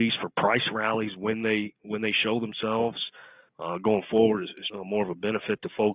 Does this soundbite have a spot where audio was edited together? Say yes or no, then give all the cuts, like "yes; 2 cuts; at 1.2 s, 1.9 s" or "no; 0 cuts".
yes; 2 cuts; at 3.5 s, 4.7 s